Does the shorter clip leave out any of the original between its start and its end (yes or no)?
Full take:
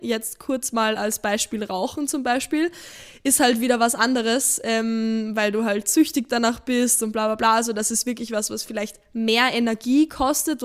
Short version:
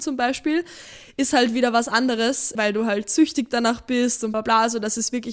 yes